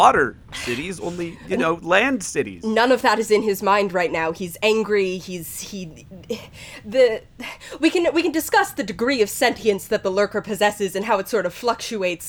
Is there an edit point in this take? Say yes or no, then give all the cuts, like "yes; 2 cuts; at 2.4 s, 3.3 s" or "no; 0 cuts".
no; 0 cuts